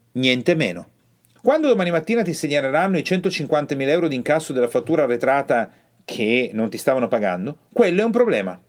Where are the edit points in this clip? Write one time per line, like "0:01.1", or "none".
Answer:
0:01.4